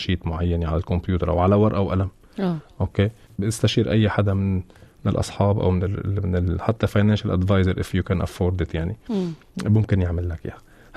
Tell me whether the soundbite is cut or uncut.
uncut